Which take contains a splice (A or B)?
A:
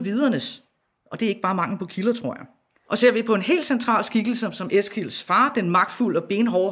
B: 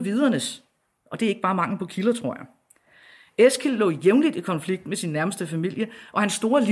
A